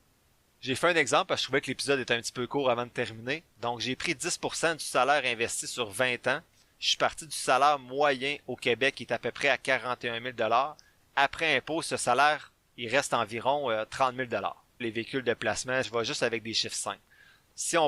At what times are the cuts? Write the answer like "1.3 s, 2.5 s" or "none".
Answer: 14.8 s, 15.8 s